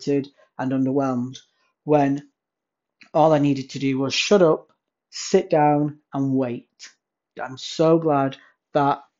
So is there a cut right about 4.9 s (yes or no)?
no